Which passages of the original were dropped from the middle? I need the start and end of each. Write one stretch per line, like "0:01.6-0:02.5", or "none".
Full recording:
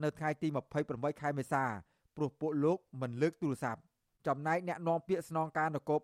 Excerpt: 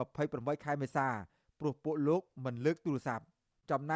none